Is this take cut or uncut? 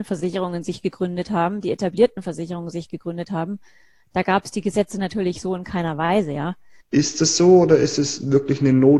cut